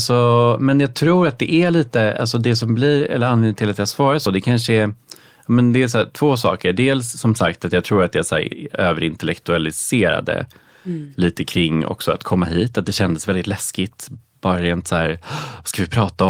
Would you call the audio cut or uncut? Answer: uncut